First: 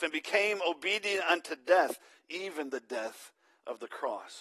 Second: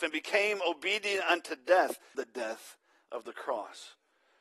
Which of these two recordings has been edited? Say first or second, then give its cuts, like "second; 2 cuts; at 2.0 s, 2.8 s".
second; 1 cut; at 2.1 s